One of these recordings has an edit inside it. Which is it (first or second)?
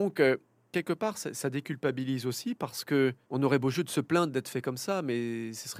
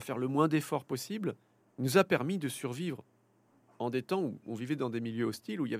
first